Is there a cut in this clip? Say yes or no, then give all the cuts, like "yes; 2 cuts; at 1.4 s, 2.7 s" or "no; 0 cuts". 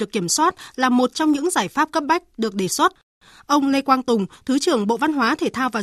no; 0 cuts